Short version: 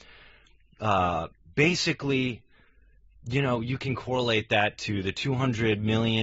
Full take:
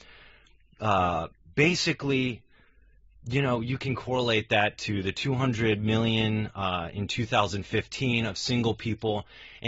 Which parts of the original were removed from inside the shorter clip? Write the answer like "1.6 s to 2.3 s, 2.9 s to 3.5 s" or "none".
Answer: none

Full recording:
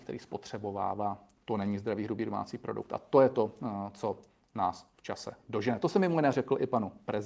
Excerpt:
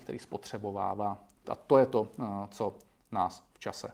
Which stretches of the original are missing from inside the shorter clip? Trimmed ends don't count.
1.4 s to 2.9 s

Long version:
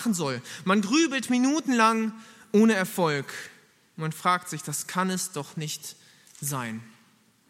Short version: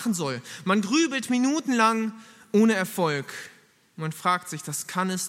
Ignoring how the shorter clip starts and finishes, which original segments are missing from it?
none

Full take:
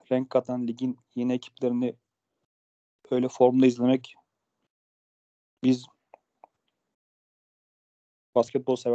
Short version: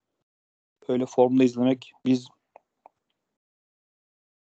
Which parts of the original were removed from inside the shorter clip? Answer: 4.2 s to 5.6 s

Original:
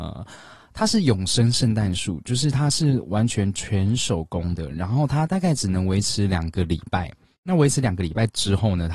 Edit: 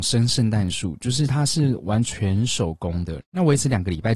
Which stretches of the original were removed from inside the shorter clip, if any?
3.3 s to 3.5 s, 4.7 s to 7.3 s

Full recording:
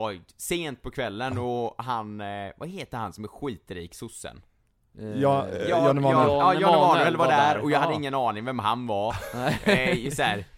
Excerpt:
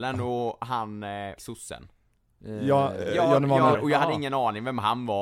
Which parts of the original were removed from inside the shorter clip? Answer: 2.5 s to 3.9 s, 6.3 s to 7.5 s

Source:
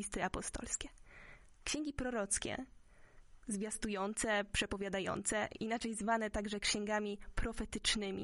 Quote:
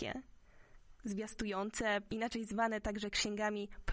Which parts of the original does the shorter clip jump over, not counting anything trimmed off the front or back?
4.5 s to 5.6 s

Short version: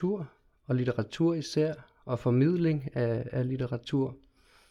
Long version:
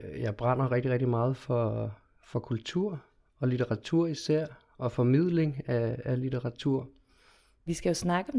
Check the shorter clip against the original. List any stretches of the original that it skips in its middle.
none

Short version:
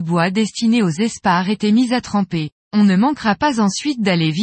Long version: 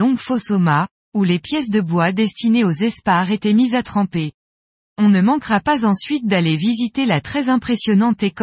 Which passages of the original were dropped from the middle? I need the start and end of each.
4.4 s to 4.9 s

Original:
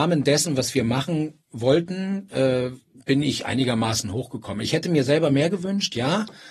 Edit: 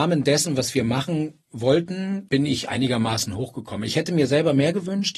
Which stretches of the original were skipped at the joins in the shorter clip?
2.3 s to 3.1 s

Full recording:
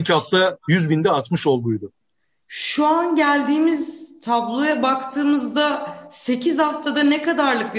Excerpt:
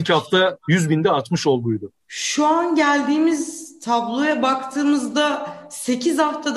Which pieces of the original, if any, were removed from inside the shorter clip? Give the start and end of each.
2.0 s to 2.4 s

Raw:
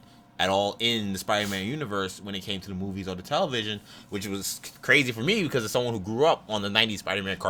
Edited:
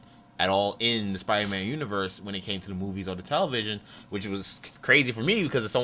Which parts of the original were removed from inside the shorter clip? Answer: none

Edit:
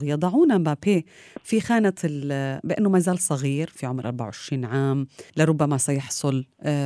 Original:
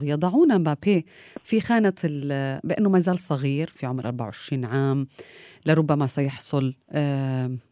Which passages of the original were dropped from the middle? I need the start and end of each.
5.3 s to 5.6 s

